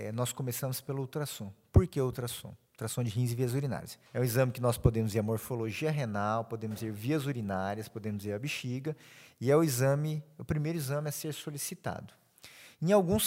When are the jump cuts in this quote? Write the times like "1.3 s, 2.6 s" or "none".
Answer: 4.1 s